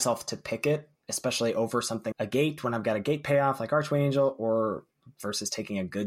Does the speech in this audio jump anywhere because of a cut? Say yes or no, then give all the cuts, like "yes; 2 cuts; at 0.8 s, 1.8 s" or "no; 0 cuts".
yes; 1 cut; at 2.1 s